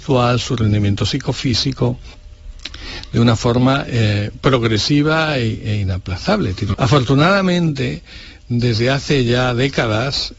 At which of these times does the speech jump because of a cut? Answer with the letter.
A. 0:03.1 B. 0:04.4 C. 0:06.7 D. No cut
C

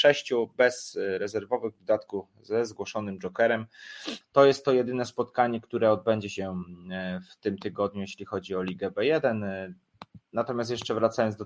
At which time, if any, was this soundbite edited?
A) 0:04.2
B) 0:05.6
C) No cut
A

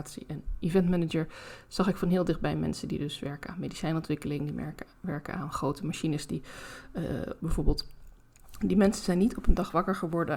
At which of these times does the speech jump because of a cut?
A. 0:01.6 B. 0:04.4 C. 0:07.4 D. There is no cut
C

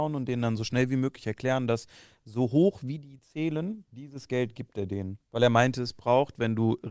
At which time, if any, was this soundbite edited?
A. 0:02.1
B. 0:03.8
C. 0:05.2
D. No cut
C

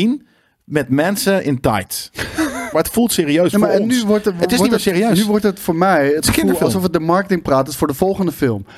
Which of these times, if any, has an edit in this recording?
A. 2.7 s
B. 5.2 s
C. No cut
A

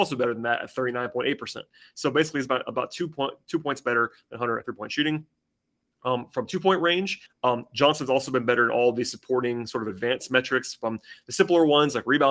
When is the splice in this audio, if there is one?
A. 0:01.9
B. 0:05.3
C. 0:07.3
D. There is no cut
C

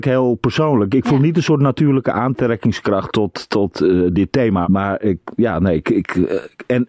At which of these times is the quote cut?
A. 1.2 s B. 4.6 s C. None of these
B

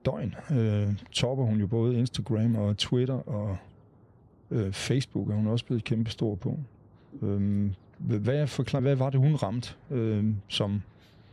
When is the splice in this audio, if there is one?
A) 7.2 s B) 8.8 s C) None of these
B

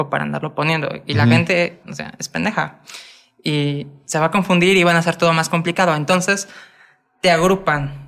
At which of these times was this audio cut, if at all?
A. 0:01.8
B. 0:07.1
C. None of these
A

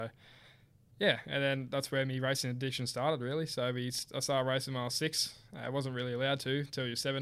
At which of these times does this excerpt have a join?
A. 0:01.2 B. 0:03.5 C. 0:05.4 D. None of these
D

